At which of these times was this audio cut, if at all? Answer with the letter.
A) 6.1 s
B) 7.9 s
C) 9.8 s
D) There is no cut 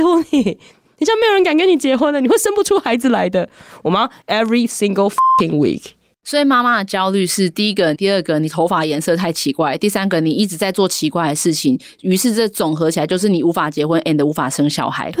B